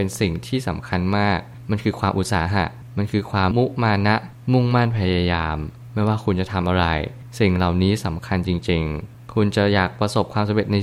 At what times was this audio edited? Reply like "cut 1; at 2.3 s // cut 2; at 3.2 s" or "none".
cut 1; at 3.5 s